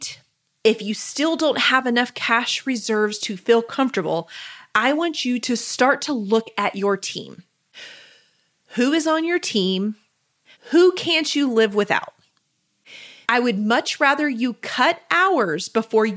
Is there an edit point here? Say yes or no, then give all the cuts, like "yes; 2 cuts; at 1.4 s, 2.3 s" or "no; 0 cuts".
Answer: yes; 2 cuts; at 10.5 s, 13.2 s